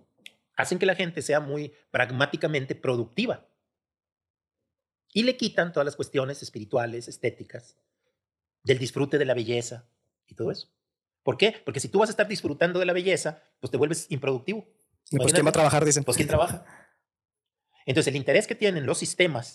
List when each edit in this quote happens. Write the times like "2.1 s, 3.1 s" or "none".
none